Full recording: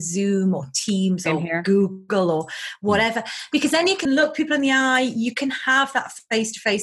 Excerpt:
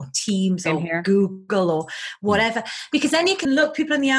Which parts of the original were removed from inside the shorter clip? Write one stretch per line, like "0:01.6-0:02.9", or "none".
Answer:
none

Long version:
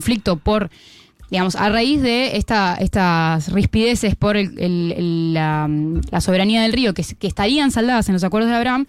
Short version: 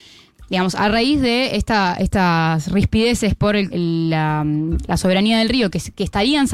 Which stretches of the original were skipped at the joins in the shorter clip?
0:04.5-0:04.9

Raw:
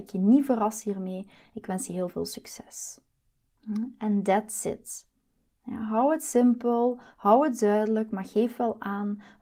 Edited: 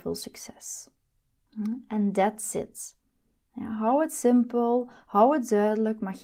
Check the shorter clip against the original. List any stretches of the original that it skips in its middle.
none

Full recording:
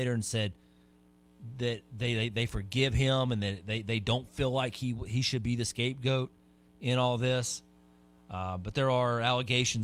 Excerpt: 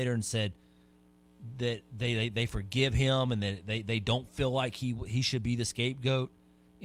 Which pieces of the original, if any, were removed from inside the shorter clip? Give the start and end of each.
none

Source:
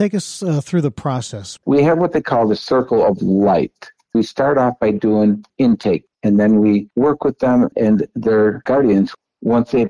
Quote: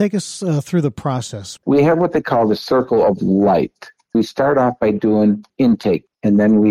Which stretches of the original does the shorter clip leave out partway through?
none

